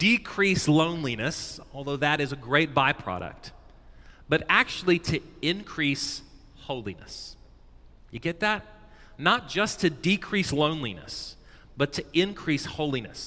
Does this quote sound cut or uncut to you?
uncut